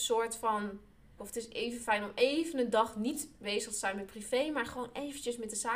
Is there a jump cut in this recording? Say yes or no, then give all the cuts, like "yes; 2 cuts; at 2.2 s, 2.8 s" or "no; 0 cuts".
yes; 1 cut; at 1.2 s